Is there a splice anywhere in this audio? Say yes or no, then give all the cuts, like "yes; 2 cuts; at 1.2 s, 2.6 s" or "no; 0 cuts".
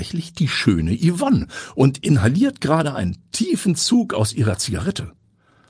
no; 0 cuts